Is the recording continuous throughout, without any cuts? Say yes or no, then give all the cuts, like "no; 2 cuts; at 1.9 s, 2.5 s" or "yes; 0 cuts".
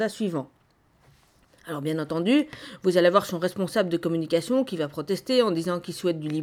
yes; 0 cuts